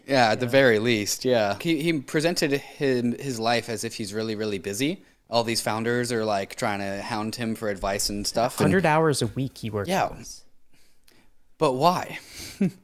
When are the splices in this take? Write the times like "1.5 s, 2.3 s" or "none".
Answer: 1.6 s